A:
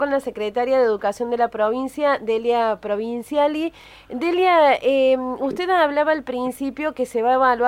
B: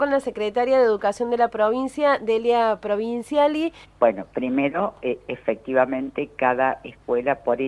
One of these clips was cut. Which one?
B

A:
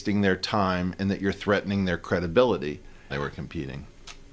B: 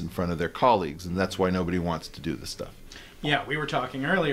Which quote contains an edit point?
A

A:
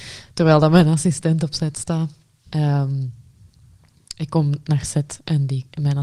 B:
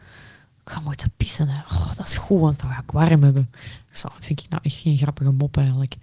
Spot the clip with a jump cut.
B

